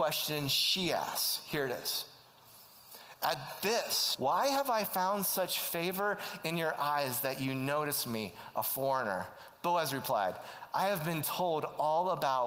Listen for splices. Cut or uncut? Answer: cut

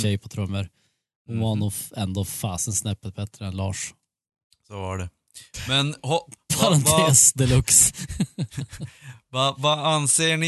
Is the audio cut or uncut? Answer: uncut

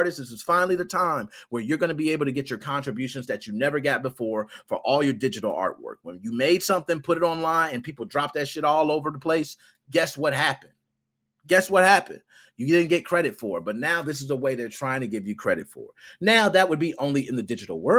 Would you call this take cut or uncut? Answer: uncut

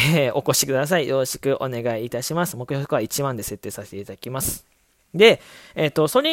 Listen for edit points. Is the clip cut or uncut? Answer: uncut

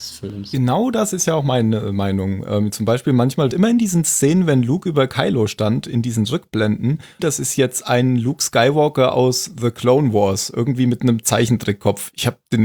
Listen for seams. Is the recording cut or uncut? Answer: cut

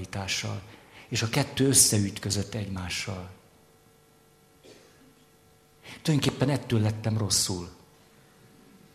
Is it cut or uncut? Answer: uncut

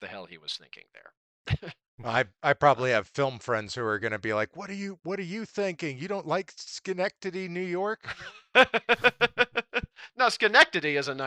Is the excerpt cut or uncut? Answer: uncut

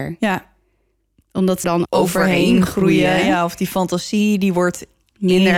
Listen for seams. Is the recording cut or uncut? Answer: cut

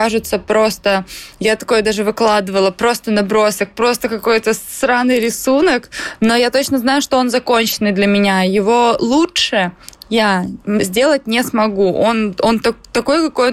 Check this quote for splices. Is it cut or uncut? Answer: uncut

